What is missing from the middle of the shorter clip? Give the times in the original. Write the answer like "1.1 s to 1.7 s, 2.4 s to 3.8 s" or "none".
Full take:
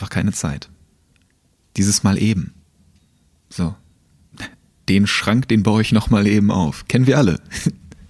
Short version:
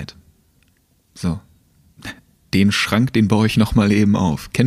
1.6 s to 3.4 s